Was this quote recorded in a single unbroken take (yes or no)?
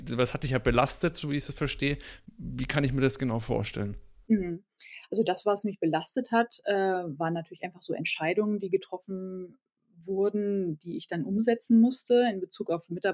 yes